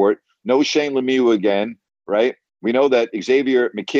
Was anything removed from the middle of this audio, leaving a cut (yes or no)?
no